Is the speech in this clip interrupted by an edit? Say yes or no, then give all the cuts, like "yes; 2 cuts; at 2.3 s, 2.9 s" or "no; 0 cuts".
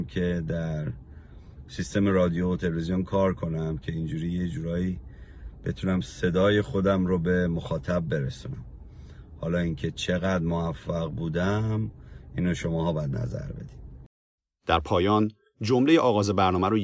no; 0 cuts